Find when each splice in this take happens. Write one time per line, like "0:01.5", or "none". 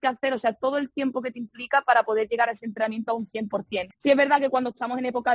0:03.9